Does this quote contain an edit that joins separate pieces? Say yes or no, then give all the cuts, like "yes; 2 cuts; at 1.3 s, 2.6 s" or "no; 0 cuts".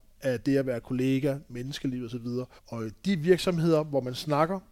yes; 1 cut; at 2.6 s